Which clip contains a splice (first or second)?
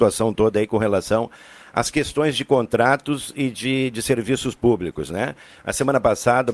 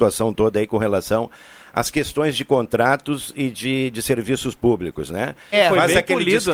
second